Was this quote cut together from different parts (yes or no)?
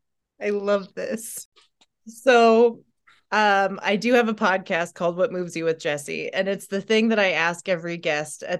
no